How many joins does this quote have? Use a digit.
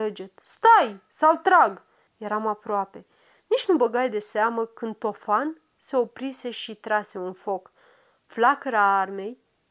1